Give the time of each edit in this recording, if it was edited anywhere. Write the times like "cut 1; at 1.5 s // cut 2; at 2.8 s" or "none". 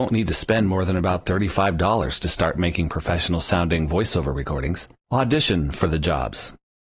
cut 1; at 5.0 s